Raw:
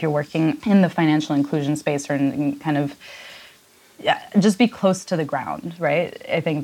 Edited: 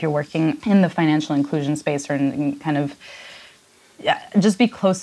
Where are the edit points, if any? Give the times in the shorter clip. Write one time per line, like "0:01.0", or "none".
none